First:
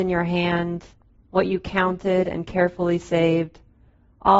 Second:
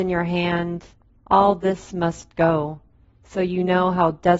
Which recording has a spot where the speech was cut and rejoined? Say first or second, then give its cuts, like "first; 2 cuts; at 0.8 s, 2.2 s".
second; 1 cut; at 1.2 s